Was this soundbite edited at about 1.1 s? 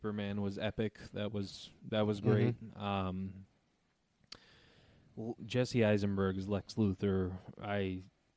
no; 1 cut; at 5.4 s

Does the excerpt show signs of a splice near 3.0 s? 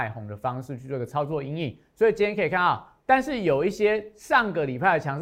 yes; 1 cut; at 3.0 s

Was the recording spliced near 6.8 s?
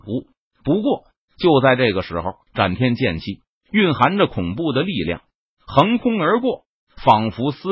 no; 2 cuts; at 2.5 s, 5.4 s

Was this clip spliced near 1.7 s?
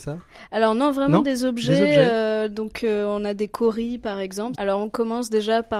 no; 1 cut; at 4.5 s

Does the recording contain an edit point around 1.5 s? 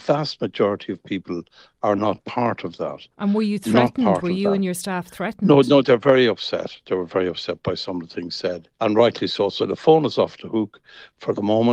no; 2 cuts; at 5.8 s, 8.7 s

